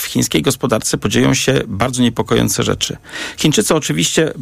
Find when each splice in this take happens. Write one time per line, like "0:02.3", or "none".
none